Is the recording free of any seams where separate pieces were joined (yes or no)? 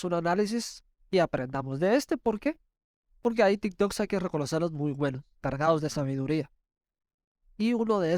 yes